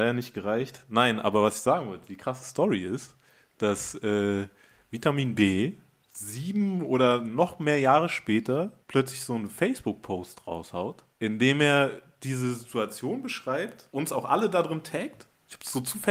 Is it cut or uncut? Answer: uncut